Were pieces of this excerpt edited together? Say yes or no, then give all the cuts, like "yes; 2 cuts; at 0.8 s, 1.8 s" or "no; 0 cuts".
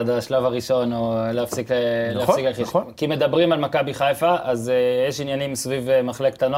no; 0 cuts